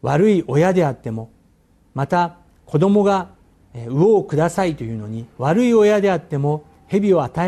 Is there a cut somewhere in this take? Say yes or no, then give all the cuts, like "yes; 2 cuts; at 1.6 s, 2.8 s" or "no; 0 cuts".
yes; 1 cut; at 5.3 s